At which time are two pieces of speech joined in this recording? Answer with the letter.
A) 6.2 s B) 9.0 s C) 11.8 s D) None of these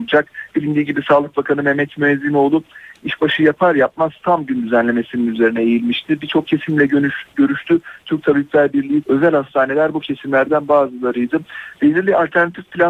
B